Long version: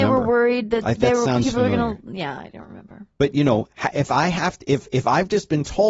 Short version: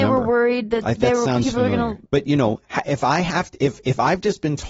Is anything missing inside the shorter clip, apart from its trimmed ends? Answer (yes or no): yes